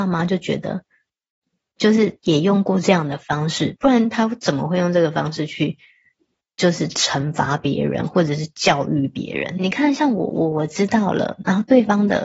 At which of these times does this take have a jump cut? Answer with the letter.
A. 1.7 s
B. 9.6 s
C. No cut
B